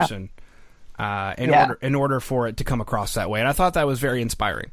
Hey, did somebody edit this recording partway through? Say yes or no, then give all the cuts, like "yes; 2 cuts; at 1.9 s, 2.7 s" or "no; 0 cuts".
no; 0 cuts